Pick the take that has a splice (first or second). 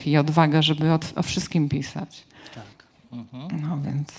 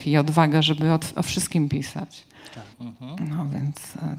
second